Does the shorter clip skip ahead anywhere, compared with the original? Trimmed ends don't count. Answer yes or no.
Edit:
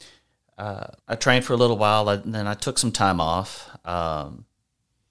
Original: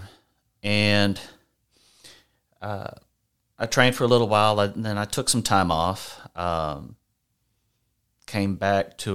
yes